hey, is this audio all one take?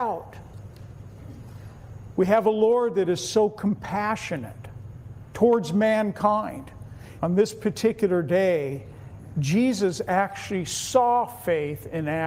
no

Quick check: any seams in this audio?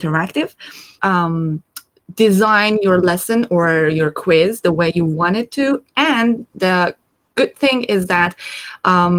yes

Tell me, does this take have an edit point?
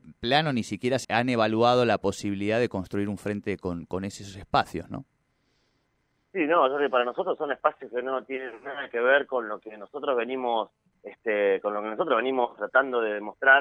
yes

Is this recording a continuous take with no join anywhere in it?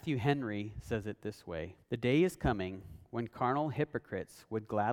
no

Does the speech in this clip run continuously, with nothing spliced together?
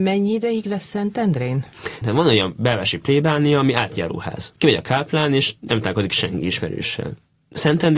no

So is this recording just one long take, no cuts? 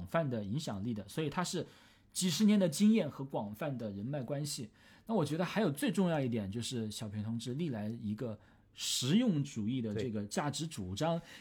yes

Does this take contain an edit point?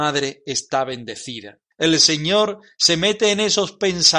yes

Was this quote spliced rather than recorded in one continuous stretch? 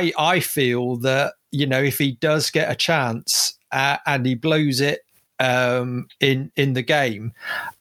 no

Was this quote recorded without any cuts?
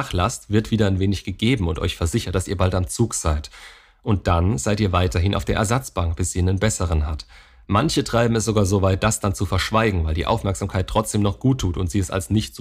yes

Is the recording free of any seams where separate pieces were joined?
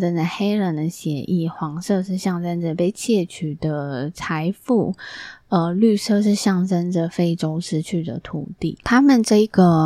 yes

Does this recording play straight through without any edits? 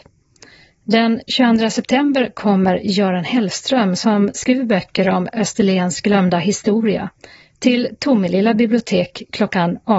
yes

